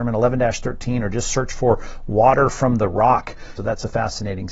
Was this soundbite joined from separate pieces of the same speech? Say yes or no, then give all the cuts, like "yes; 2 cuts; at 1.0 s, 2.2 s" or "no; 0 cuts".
yes; 1 cut; at 3.6 s